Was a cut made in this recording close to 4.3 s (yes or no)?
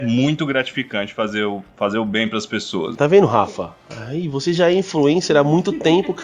no